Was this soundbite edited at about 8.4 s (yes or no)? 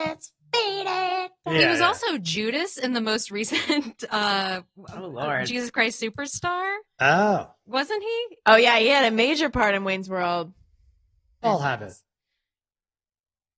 yes